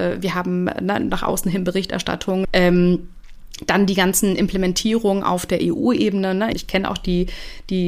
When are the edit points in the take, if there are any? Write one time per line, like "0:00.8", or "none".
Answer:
0:02.4
0:06.5